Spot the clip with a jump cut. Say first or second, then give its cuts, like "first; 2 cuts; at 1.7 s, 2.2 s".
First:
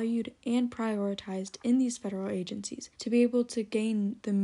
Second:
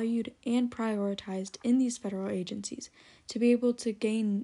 first; 1 cut; at 2.9 s